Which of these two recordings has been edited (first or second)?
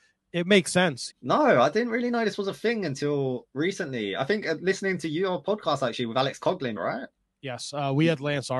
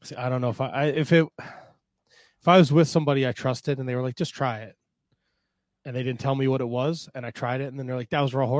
first